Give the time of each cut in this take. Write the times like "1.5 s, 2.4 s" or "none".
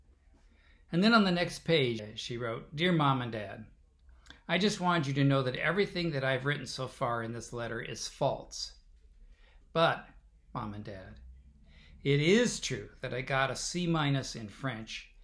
2.0 s, 9.6 s